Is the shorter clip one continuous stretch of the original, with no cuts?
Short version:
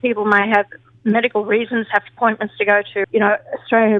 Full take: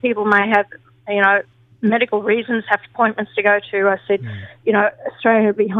no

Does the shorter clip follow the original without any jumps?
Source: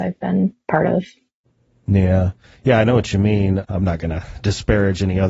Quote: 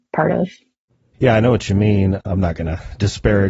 no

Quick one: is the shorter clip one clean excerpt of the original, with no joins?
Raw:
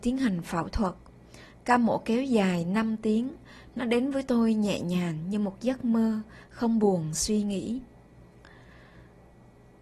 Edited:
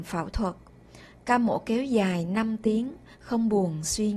no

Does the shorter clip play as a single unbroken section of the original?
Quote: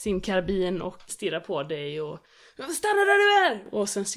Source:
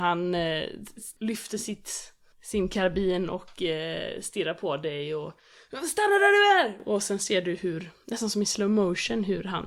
no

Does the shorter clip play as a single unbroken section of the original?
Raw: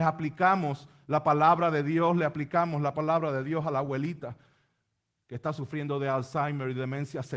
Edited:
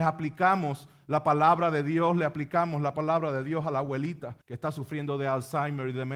no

